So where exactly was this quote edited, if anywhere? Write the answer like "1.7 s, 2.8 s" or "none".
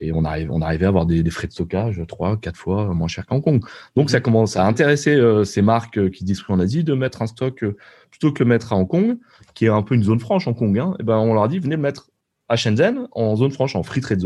none